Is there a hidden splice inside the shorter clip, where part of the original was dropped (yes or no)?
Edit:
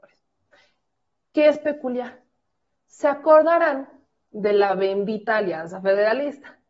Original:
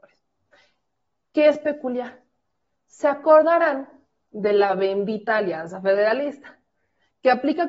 no